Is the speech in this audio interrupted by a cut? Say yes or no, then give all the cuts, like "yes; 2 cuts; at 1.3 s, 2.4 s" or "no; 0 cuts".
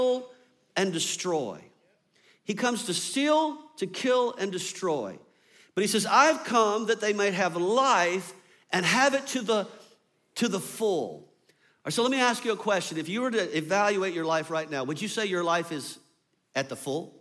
no; 0 cuts